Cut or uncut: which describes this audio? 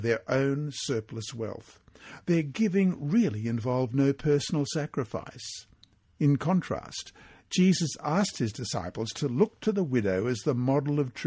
uncut